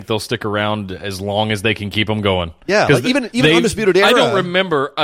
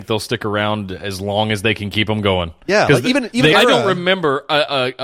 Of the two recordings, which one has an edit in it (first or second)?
second